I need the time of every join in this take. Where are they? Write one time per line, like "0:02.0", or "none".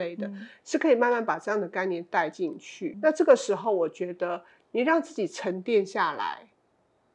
0:02.9

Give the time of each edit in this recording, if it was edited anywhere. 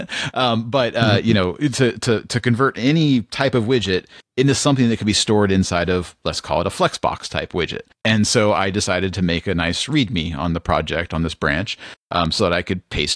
0:08.0

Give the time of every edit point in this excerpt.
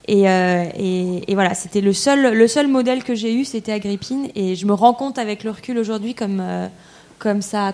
none

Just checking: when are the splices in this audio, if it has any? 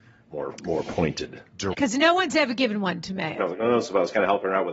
0:01.7
0:03.4

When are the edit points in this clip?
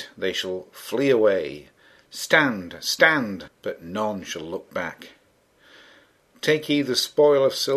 0:03.5

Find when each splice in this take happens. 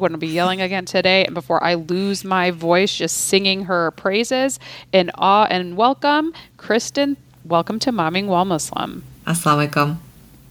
0:09.2

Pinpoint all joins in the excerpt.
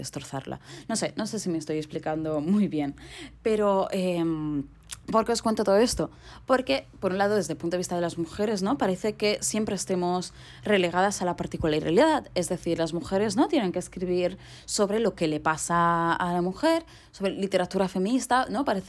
none

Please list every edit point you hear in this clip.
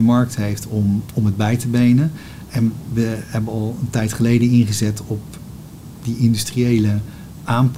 none

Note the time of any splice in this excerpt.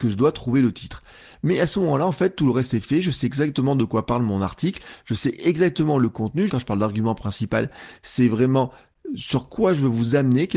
0:06.5

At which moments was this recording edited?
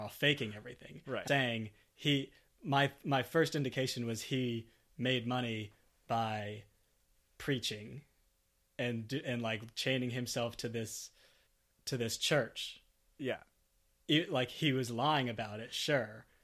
0:01.3

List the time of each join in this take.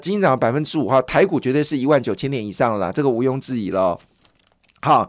none

